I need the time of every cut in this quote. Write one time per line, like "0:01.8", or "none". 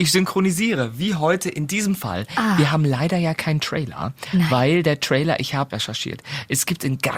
0:05.7